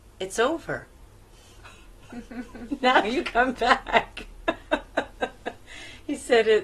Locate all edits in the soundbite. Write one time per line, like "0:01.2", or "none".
none